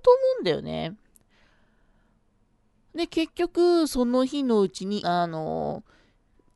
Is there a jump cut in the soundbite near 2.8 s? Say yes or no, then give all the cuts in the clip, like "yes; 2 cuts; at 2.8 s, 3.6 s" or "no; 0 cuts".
no; 1 cut; at 5.0 s